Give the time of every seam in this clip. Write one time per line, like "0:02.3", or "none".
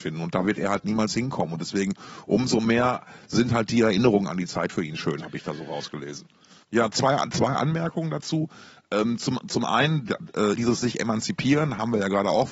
0:06.6
0:10.6